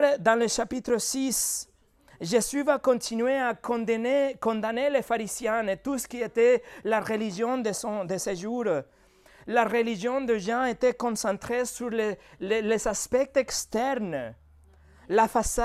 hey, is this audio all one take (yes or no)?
yes